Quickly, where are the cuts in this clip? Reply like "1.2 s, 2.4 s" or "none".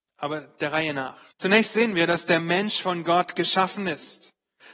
1.3 s